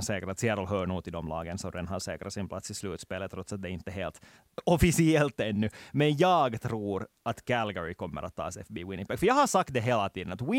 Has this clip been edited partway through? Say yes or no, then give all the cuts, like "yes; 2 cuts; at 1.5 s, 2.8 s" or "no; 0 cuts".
no; 0 cuts